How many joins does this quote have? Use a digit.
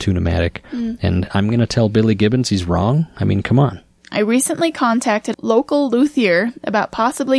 2